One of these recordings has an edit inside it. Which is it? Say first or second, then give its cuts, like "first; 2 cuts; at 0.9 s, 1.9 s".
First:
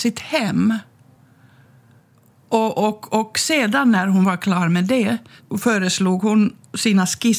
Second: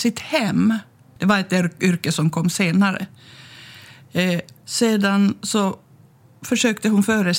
second; 2 cuts; at 1.2 s, 4.6 s